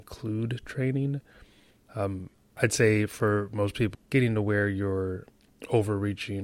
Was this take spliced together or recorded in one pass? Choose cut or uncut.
cut